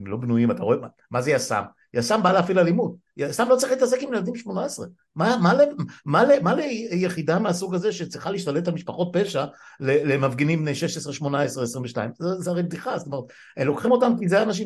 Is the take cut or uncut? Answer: uncut